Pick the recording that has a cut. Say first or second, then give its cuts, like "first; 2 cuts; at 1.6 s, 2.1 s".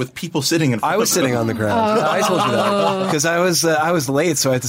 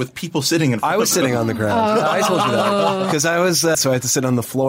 second; 1 cut; at 3.7 s